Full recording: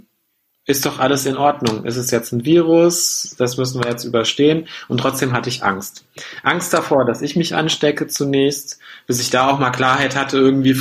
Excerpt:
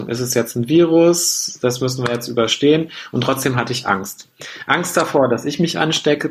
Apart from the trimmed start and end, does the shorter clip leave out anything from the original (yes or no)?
no